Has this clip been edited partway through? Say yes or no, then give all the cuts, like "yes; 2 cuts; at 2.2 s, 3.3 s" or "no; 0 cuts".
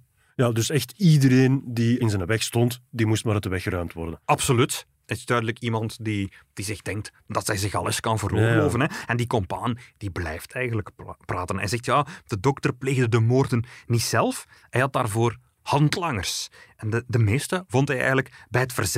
no; 0 cuts